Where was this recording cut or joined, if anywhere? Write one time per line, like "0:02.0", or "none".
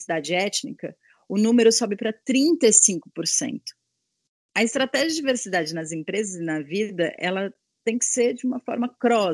none